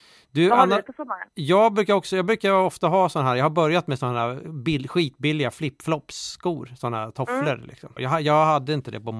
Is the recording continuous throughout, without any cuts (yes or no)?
no